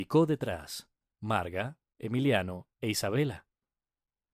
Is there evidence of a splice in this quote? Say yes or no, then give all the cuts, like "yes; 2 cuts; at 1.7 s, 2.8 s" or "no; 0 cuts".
no; 0 cuts